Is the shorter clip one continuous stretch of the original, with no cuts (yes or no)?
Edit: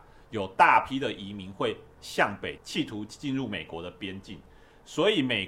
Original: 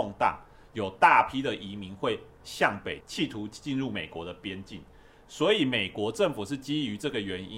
yes